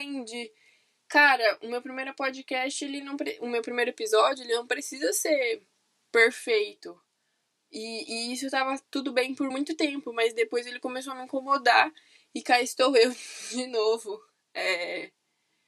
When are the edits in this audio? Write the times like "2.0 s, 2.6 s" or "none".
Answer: none